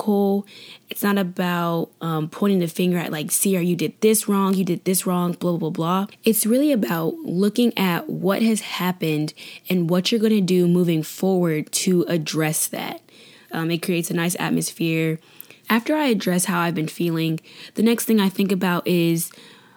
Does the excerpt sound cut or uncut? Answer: cut